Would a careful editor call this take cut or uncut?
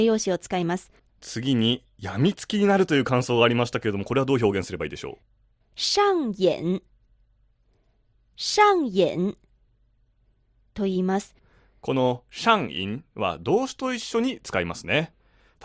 cut